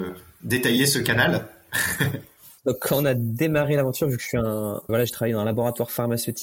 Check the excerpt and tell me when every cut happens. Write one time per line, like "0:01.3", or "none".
0:02.6
0:04.9